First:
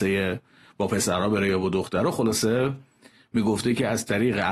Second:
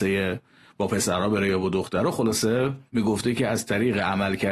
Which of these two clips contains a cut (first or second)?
second